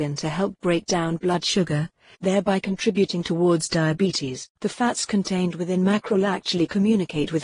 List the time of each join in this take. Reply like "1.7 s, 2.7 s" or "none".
2.1 s, 4.6 s